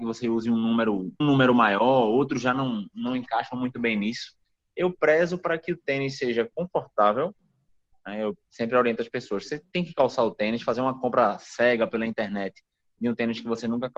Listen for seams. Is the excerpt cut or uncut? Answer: cut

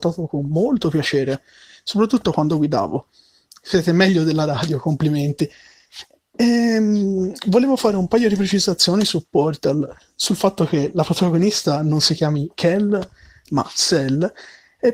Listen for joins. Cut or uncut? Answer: uncut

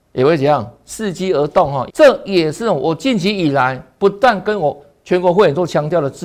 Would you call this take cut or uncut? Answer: cut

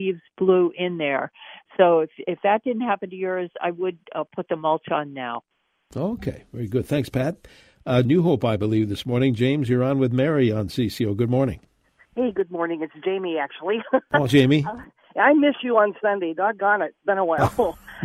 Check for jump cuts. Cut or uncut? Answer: cut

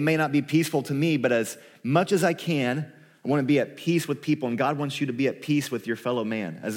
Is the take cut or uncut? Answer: uncut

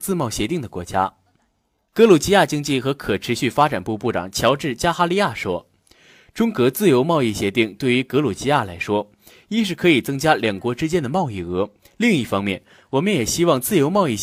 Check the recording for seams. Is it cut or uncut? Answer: uncut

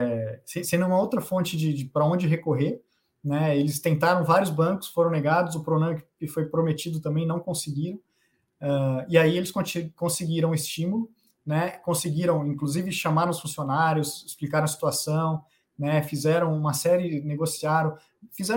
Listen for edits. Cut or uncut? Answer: uncut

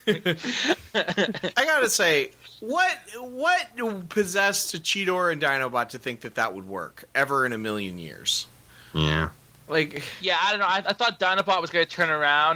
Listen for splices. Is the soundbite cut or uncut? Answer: uncut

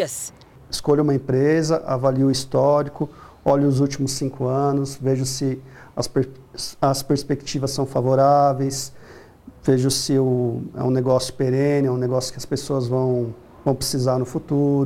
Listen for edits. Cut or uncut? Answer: uncut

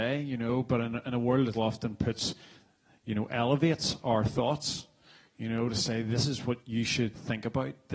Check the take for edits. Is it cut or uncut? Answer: cut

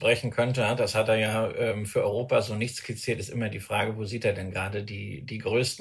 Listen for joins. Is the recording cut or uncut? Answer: uncut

